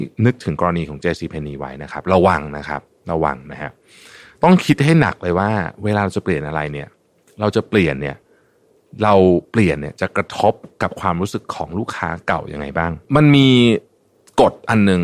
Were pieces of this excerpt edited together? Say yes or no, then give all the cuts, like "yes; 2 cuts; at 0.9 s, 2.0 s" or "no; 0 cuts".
yes; 1 cut; at 13.0 s